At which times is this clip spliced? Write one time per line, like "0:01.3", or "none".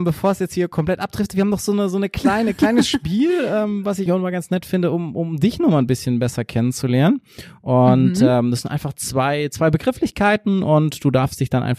0:04.1

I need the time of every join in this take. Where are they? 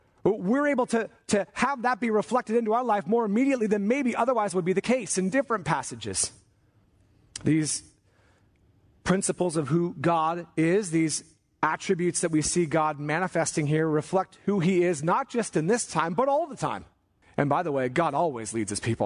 0:17.2

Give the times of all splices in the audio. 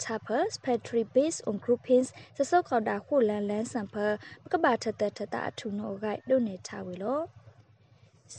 none

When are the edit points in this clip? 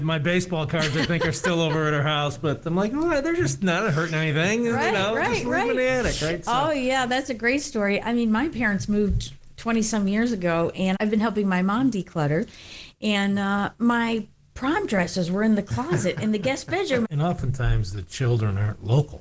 0:10.9
0:17.0

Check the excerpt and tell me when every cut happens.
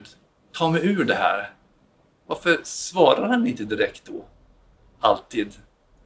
none

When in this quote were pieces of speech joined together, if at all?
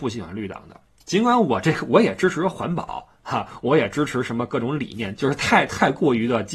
0:05.2

